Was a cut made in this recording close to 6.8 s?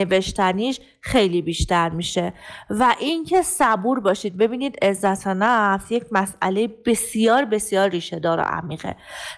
no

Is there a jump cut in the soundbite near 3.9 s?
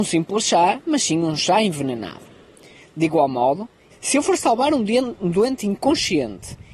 yes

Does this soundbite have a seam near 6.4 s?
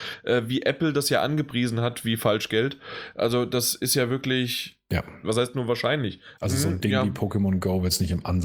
yes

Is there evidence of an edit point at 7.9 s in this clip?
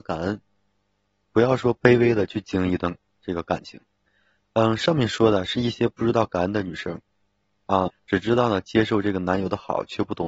yes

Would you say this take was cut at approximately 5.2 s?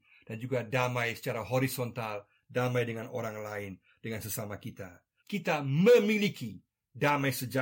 yes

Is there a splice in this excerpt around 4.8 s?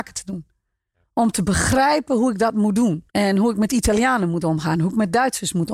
no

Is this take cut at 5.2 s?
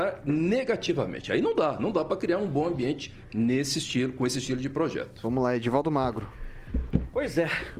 no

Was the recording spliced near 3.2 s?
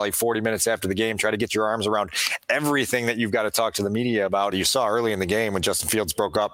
no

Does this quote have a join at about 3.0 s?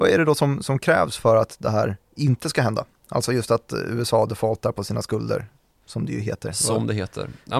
no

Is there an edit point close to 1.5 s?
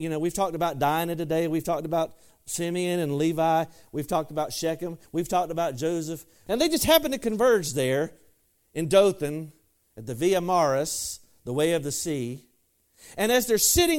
no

